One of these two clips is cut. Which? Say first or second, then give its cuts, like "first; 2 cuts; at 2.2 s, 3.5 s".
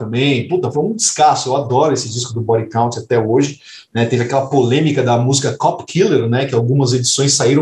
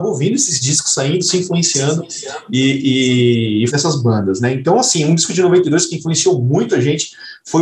second; 1 cut; at 3.7 s